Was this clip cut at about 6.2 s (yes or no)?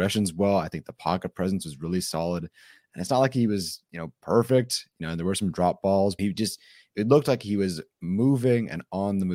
yes